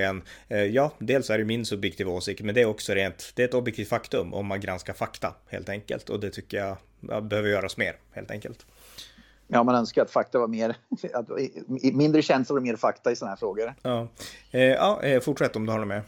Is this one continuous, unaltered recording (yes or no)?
yes